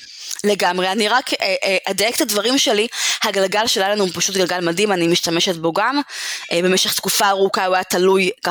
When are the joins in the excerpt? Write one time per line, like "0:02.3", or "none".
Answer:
none